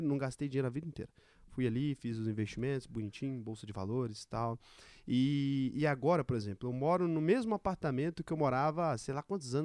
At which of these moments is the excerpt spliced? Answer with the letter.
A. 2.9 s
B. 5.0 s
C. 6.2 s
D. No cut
D